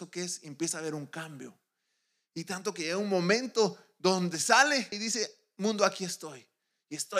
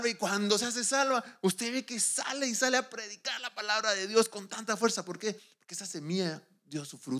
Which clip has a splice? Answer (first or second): first